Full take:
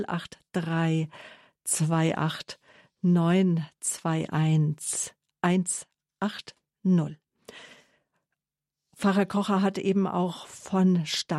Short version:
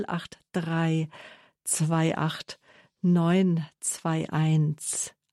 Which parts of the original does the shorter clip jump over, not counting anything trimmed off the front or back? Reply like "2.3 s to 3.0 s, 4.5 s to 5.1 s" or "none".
none